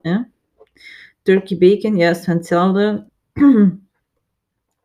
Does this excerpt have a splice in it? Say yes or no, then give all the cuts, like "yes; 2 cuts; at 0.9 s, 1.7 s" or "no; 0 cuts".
yes; 1 cut; at 3.1 s